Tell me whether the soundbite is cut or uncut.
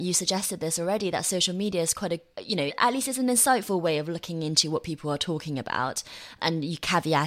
uncut